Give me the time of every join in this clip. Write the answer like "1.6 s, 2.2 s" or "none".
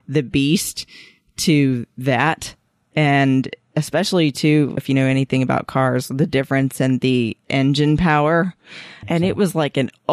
4.8 s, 9.0 s